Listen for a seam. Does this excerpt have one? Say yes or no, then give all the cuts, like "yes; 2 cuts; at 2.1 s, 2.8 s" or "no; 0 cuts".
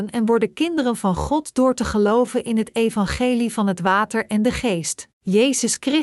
yes; 1 cut; at 5.1 s